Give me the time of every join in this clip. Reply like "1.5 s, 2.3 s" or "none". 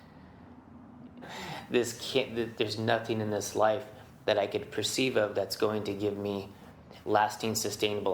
1.2 s